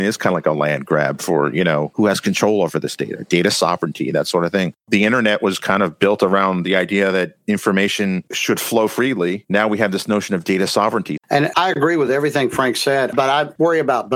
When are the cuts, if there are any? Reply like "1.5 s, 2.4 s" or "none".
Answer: 11.2 s